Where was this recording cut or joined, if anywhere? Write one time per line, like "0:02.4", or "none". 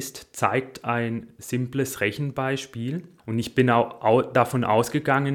0:03.2